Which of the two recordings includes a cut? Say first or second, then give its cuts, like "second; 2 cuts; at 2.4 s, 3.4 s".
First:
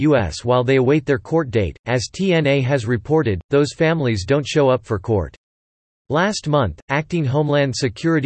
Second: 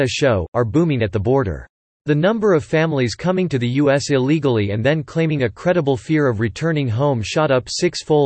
first; 1 cut; at 1.8 s